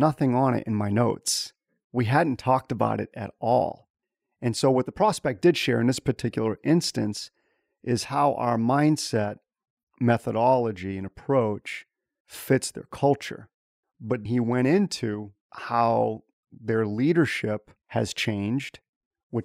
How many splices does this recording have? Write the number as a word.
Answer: three